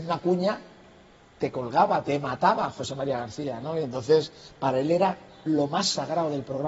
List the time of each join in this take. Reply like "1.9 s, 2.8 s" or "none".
none